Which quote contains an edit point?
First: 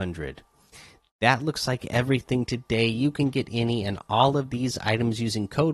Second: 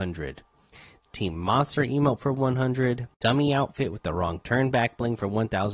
second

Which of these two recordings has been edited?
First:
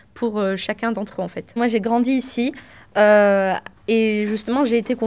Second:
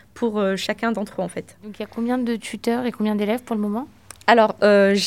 first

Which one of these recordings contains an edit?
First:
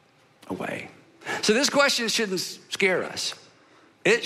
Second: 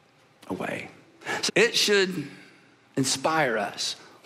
second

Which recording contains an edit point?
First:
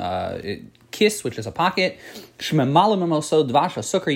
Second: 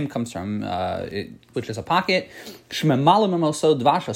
second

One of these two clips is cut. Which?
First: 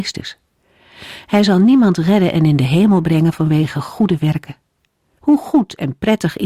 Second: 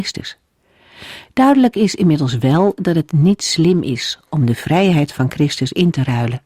second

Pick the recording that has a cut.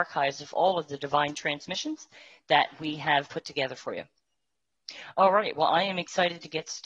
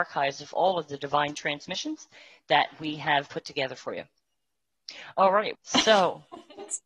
second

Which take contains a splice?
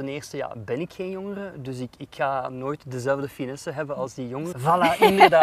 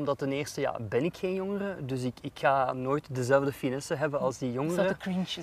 first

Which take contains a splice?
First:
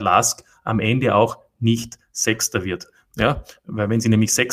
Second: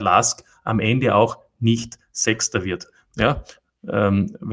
first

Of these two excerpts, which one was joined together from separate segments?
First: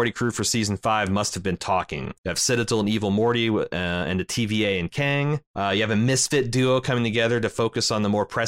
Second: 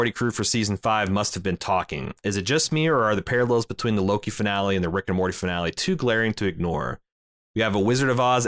first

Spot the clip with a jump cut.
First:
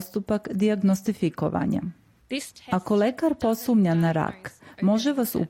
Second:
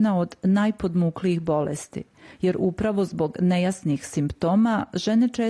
first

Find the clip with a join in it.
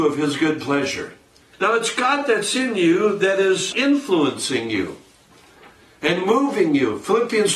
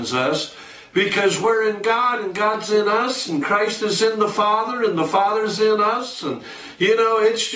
first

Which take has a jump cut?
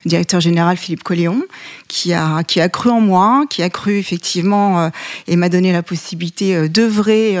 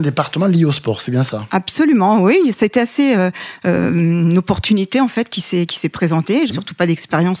second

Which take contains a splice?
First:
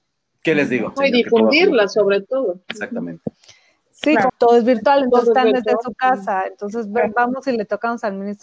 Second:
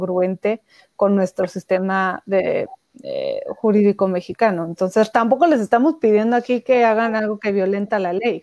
first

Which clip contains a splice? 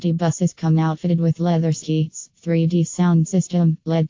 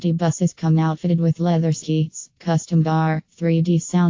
first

